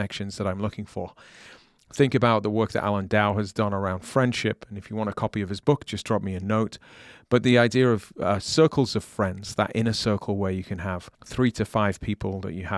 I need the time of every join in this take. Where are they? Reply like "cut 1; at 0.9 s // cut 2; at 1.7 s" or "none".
cut 1; at 11.1 s